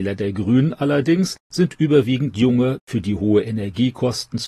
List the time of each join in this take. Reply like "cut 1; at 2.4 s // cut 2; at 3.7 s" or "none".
cut 1; at 2.8 s